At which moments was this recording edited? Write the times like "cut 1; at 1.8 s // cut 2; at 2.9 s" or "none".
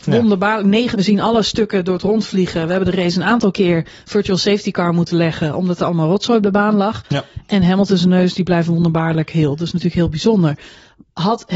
cut 1; at 0.9 s